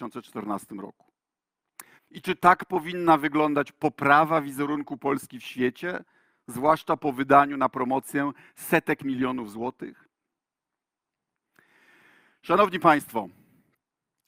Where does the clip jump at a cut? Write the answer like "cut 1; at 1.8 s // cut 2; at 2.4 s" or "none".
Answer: cut 1; at 2.0 s